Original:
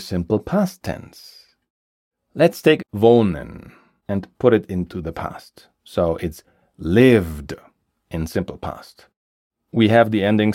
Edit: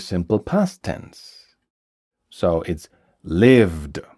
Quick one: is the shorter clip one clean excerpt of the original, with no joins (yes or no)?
no